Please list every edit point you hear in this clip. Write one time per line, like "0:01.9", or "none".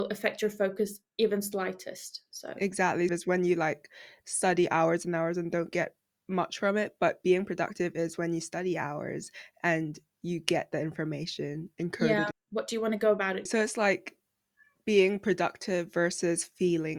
0:03.1
0:12.3
0:13.5